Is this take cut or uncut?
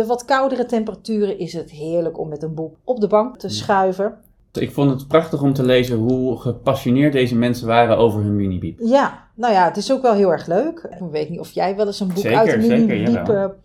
cut